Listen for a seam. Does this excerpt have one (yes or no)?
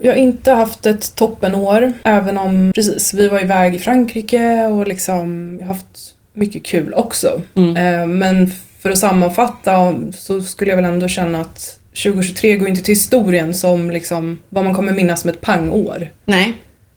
yes